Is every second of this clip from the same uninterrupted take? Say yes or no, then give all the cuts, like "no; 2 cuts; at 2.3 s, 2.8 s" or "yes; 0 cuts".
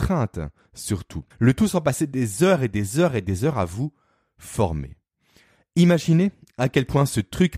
no; 1 cut; at 1.3 s